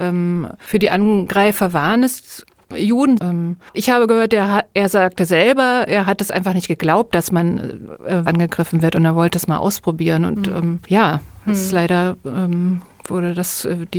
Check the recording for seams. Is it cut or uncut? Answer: cut